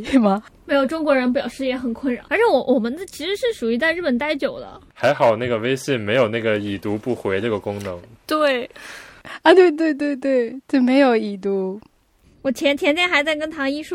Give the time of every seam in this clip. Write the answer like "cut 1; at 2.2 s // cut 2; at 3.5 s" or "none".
cut 1; at 2.3 s